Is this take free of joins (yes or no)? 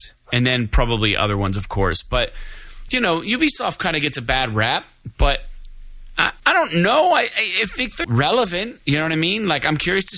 no